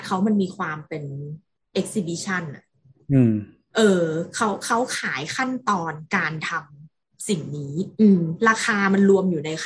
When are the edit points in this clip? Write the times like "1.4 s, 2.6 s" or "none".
7.9 s